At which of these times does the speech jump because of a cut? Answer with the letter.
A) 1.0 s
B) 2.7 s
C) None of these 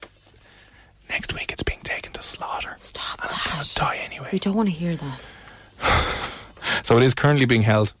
C